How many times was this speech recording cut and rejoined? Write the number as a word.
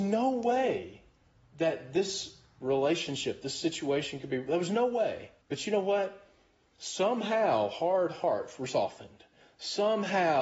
one